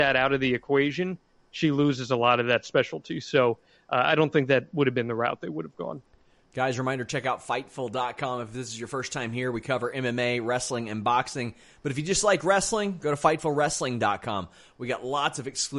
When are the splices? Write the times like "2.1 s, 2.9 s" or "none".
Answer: none